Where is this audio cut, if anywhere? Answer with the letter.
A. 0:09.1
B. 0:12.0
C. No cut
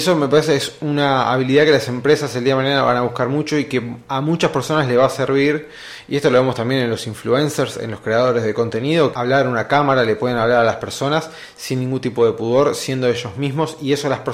A